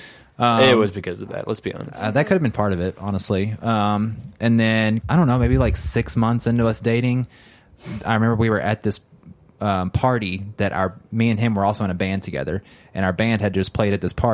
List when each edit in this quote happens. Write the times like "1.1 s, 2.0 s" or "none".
5.0 s